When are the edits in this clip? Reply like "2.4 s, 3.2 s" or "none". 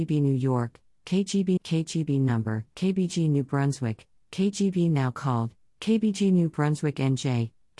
1.6 s

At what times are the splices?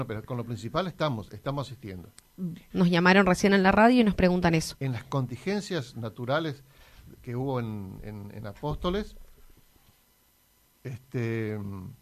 2.7 s, 4.8 s

